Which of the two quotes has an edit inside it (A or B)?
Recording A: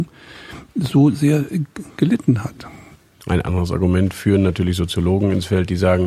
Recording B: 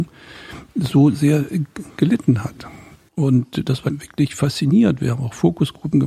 B